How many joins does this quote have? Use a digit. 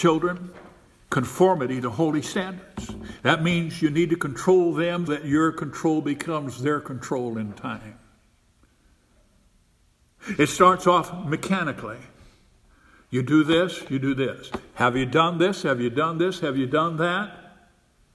2